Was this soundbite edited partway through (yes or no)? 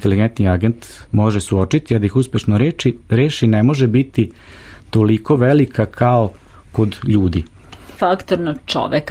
yes